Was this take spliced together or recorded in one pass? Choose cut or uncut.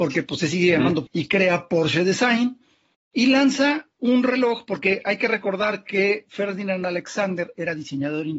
cut